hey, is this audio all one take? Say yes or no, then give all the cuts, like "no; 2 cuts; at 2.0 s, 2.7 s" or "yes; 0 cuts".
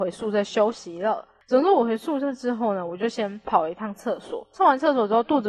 yes; 0 cuts